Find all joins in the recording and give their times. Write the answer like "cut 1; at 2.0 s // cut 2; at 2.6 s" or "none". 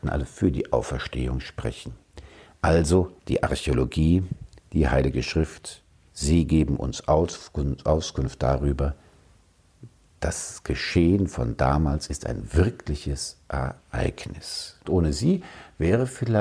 cut 1; at 3.2 s // cut 2; at 6.1 s // cut 3; at 14.8 s